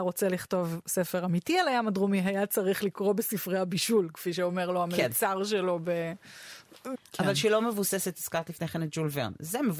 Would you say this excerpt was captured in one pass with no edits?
no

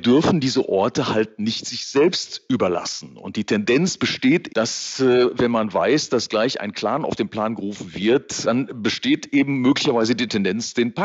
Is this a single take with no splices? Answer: no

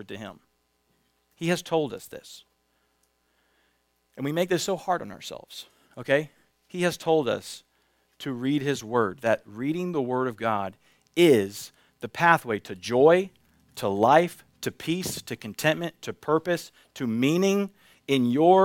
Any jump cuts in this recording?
no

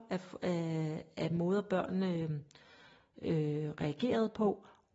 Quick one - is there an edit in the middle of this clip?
no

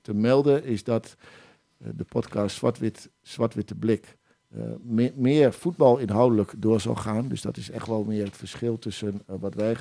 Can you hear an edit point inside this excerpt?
no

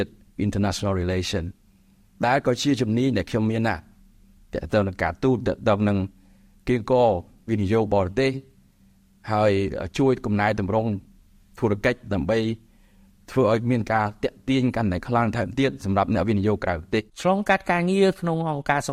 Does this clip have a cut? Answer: yes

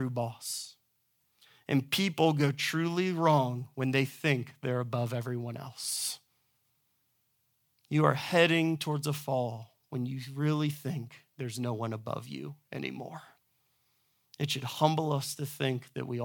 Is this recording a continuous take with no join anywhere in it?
yes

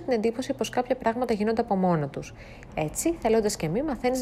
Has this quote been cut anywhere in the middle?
yes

